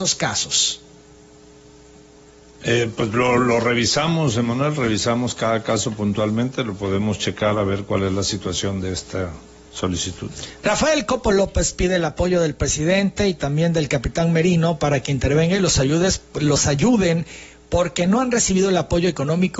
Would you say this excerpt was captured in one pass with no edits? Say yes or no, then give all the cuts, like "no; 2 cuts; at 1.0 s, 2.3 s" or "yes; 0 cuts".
yes; 0 cuts